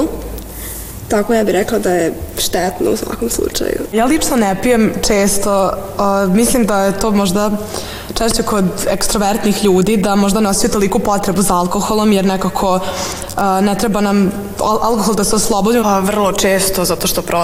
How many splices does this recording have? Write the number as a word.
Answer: one